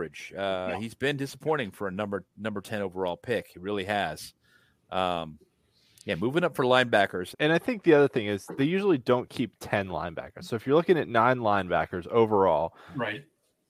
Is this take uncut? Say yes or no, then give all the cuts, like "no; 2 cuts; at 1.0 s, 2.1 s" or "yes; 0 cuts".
no; 1 cut; at 7.3 s